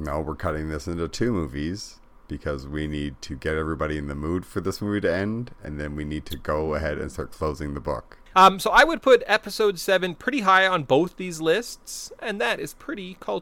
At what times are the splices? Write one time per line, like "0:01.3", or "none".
0:08.3